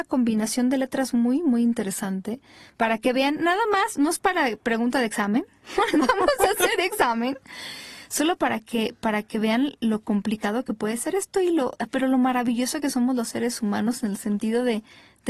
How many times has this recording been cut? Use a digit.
0